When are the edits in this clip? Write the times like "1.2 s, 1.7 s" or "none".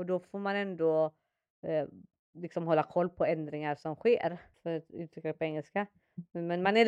4.5 s